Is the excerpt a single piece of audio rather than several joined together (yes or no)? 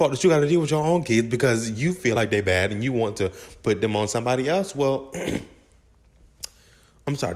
yes